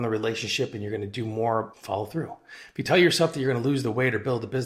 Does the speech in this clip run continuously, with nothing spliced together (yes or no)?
no